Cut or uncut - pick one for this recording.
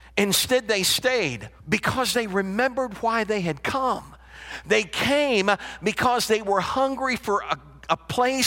cut